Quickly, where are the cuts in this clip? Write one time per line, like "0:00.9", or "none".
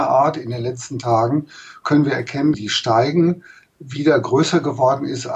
0:02.5